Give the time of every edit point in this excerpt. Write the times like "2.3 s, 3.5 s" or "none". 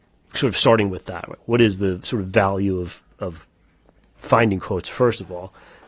none